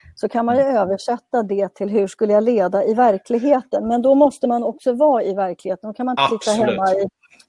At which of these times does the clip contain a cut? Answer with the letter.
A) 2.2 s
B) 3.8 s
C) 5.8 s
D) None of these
D